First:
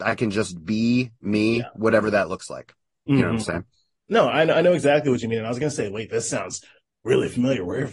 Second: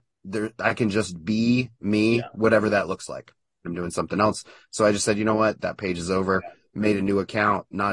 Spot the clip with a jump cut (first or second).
second